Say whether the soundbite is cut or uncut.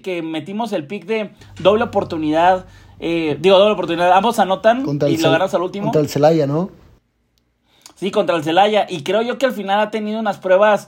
uncut